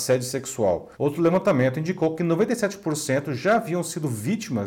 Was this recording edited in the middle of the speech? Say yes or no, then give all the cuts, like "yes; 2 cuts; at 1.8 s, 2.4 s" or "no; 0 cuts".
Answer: yes; 1 cut; at 0.9 s